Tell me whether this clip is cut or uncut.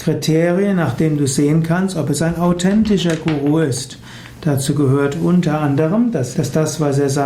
cut